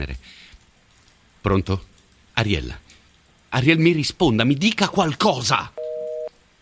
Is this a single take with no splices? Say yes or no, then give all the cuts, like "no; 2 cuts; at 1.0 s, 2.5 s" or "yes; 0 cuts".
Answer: yes; 0 cuts